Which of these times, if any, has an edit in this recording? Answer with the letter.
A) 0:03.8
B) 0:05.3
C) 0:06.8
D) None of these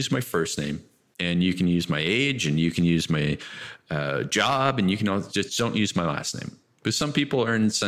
D